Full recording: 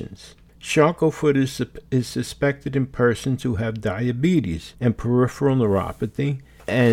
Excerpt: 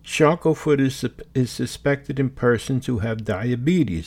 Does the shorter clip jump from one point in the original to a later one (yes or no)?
no